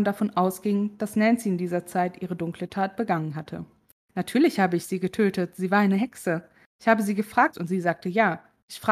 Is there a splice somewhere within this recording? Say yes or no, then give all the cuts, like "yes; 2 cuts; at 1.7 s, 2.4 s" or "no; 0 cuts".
yes; 2 cuts; at 4.0 s, 7.5 s